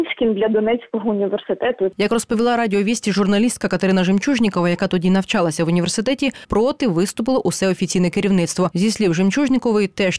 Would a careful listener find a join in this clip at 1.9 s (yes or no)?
yes